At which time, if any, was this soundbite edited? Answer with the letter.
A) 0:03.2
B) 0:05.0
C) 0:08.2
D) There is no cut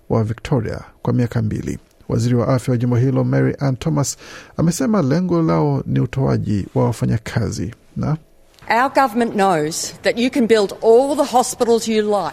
D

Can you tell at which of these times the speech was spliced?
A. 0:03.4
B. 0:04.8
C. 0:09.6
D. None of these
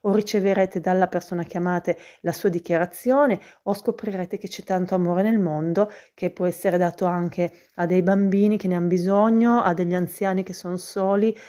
D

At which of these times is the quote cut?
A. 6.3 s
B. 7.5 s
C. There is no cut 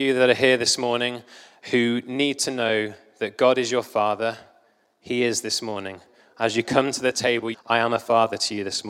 B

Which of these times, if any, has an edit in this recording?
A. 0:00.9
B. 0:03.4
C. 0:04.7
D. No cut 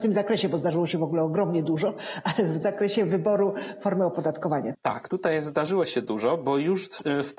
C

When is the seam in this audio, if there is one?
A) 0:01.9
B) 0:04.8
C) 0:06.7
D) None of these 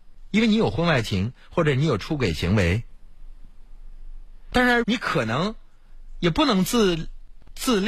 B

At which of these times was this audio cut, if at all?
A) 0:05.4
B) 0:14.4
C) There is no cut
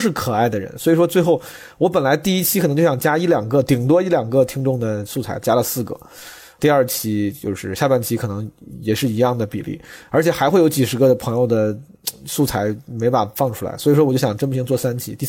A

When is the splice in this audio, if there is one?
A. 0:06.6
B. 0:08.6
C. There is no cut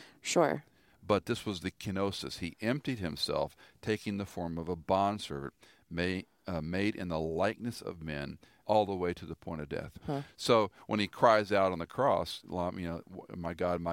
B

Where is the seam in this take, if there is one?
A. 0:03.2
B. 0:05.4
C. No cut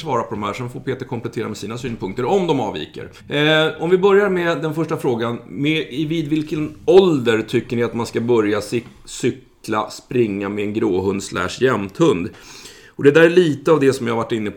A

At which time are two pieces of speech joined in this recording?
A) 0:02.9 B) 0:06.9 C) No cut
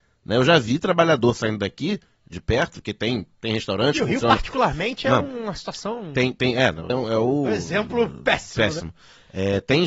B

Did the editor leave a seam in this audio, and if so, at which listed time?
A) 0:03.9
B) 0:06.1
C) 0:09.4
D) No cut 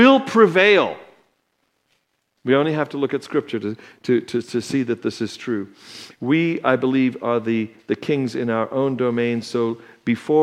D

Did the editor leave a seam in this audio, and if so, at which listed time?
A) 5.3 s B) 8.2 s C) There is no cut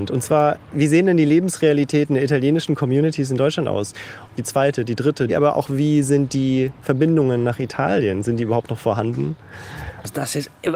A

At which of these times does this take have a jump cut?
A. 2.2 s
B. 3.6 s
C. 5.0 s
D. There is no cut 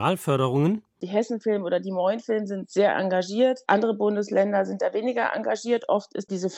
D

